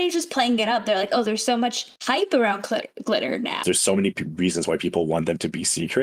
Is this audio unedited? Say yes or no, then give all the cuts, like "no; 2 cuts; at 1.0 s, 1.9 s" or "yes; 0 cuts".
no; 2 cuts; at 2.0 s, 3.6 s